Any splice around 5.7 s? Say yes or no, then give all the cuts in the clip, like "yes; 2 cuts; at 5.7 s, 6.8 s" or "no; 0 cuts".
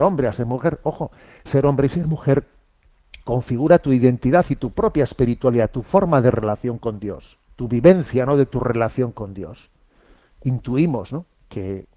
no; 1 cut; at 7.4 s